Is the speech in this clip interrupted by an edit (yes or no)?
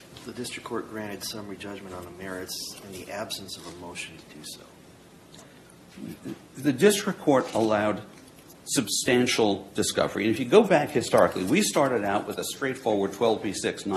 no